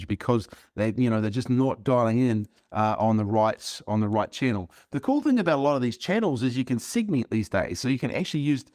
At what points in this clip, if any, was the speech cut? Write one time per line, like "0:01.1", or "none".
none